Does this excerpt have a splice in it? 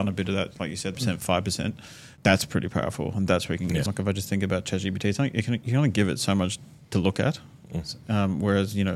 yes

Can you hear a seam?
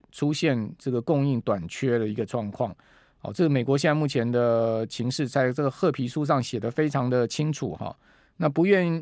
yes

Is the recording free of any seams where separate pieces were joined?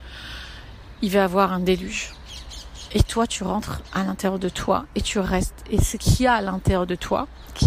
yes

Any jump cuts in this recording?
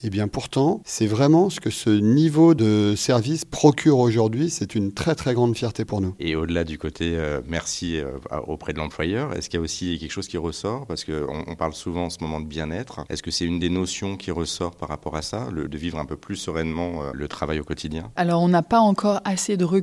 yes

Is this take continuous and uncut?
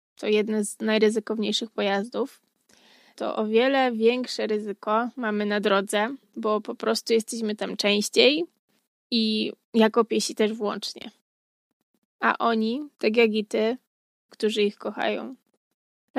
no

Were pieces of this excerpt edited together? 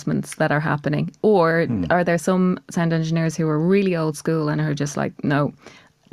no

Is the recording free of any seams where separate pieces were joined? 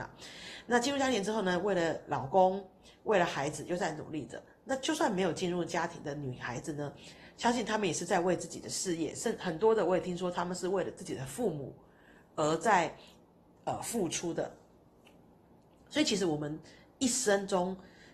yes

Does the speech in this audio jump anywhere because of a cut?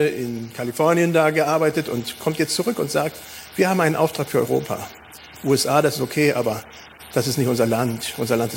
no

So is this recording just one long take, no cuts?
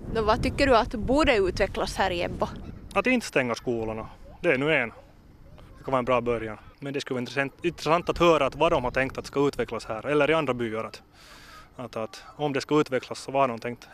no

